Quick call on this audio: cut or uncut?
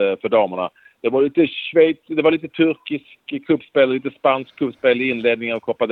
uncut